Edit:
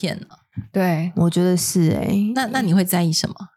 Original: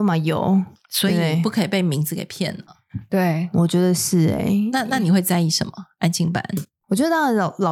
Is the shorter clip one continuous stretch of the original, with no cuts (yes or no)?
yes